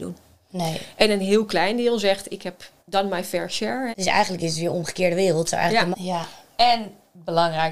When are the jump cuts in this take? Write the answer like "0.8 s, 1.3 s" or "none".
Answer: 2.8 s, 3.9 s, 5.9 s